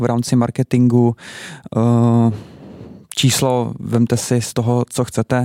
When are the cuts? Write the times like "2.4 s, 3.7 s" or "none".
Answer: none